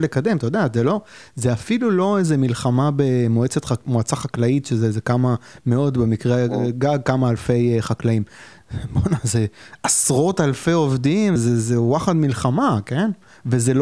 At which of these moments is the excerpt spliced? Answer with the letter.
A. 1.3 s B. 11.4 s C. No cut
B